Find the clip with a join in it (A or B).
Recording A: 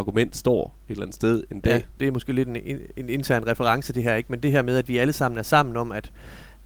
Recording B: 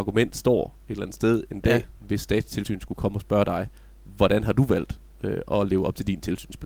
A